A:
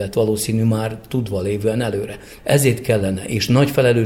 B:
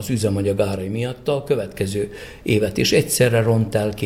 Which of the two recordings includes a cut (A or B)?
A